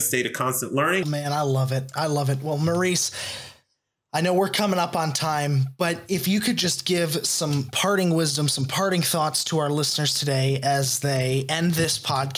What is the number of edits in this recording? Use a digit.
1